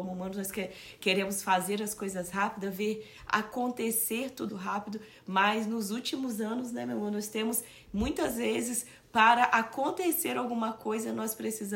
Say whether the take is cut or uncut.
cut